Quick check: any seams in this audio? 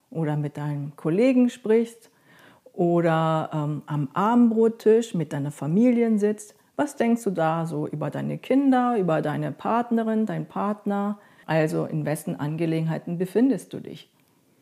yes; 1 cut; at 11.4 s

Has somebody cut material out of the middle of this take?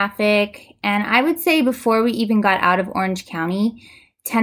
no; 0 cuts

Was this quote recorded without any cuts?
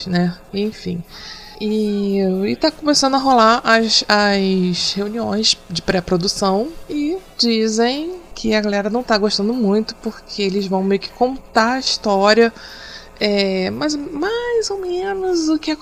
yes; 0 cuts

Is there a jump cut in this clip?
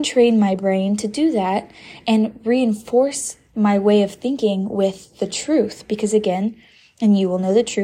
no; 0 cuts

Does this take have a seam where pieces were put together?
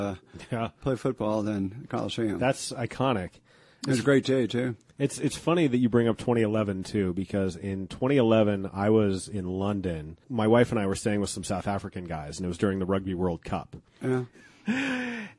yes; 1 cut; at 14.3 s

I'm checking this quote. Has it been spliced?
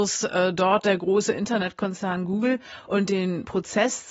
no; 0 cuts

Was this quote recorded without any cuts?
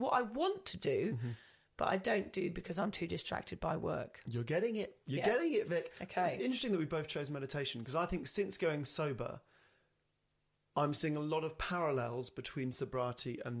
yes; 0 cuts

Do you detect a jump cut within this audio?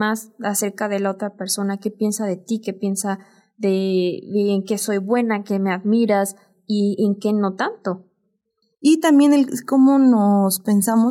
no; 0 cuts

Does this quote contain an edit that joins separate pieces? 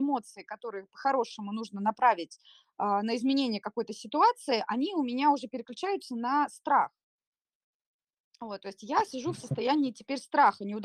no; 0 cuts

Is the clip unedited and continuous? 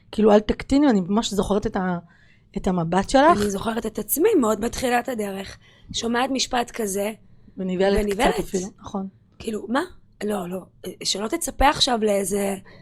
yes; 0 cuts

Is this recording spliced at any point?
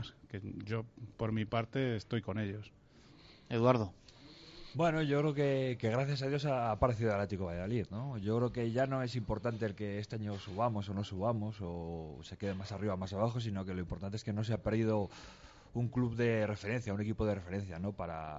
no; 0 cuts

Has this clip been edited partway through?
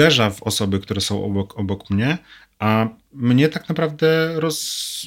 no; 0 cuts

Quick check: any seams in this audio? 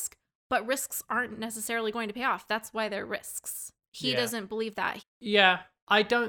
yes; 1 cut; at 5.0 s

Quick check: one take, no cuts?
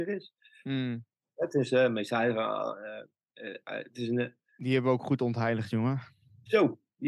yes; 0 cuts

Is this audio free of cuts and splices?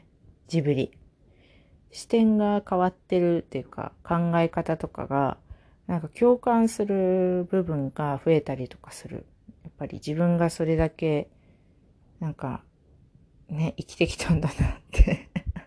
yes; 0 cuts

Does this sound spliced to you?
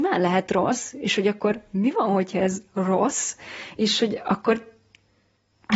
no; 0 cuts

